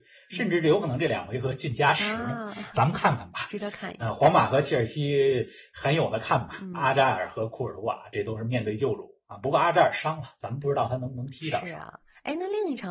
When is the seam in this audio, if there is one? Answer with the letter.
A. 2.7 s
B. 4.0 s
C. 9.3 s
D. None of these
D